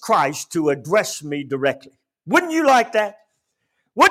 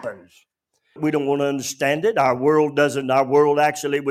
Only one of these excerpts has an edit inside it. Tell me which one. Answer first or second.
second